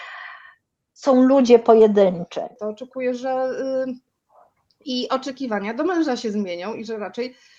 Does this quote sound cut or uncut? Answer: cut